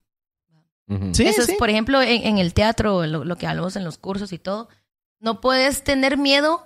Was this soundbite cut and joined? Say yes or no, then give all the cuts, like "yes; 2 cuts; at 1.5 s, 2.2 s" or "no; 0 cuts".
no; 0 cuts